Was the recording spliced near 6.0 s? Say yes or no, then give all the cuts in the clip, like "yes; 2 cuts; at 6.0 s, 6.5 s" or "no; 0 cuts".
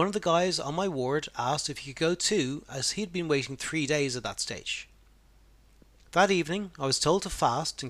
yes; 1 cut; at 6.0 s